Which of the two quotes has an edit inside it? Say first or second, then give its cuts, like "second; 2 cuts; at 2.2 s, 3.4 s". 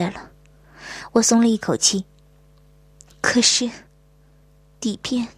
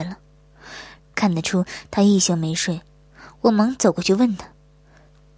second; 1 cut; at 1.0 s